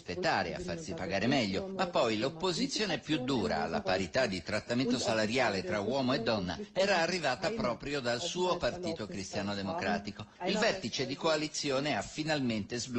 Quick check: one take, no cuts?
yes; 0 cuts

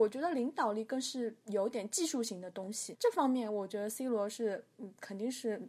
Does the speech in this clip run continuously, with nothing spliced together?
no; 1 cut; at 2.9 s

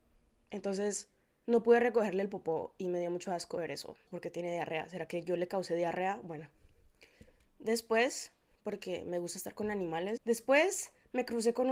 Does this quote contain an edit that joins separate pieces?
yes; 3 cuts; at 4.1 s, 8.5 s, 10.2 s

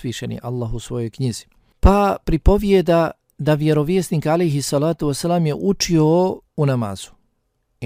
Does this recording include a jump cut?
yes; 2 cuts; at 1.7 s, 6.5 s

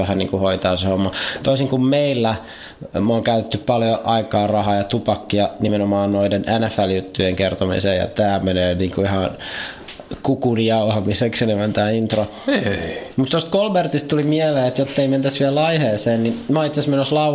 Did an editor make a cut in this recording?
no; 0 cuts

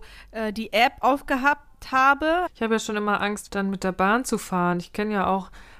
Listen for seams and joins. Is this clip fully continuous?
no; 2 cuts; at 2.5 s, 3.5 s

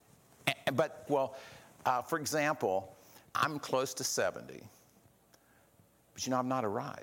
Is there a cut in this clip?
yes; 2 cuts; at 1.1 s, 3.3 s

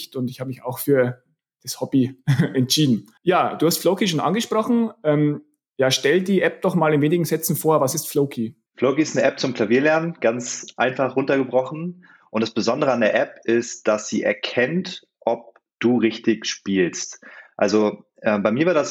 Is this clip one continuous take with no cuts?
no; 2 cuts; at 3.2 s, 8.7 s

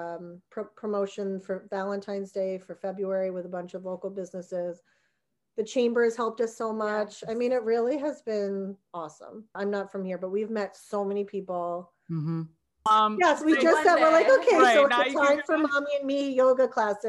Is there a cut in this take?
yes; 2 cuts; at 9.5 s, 12.9 s

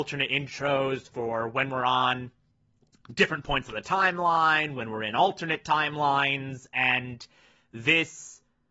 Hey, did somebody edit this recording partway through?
no; 0 cuts

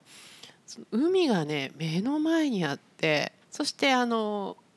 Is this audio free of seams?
no; 1 cut; at 3.4 s

